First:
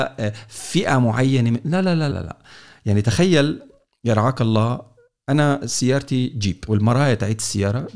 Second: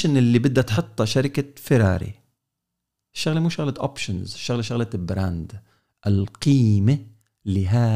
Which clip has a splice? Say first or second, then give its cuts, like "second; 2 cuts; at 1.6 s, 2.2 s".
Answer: first; 1 cut; at 2.1 s